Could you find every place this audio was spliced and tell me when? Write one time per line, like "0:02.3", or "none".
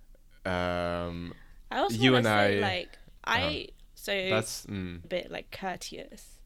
0:03.9
0:05.0